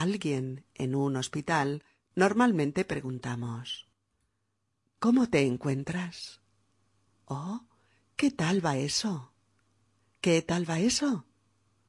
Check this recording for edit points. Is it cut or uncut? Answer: cut